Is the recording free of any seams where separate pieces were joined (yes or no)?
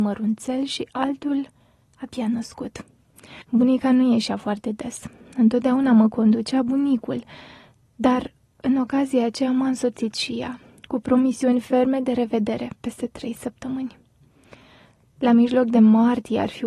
no